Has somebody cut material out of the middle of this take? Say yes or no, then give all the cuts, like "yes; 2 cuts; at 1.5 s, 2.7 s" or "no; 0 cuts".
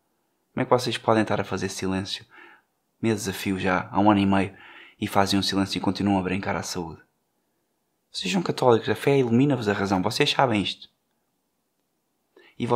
no; 0 cuts